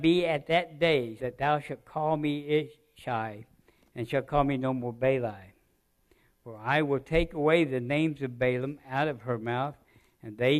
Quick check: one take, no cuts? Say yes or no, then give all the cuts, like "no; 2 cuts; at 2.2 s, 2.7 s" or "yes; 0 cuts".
no; 1 cut; at 1.2 s